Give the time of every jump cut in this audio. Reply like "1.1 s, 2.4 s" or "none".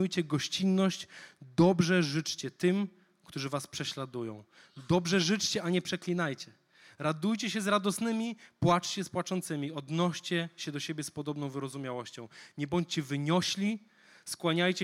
none